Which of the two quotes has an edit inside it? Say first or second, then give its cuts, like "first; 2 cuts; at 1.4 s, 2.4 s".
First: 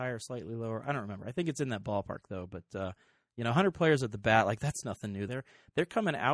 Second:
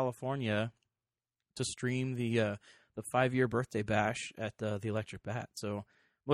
first; 1 cut; at 5.3 s